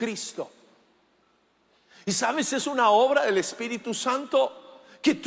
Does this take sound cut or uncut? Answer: uncut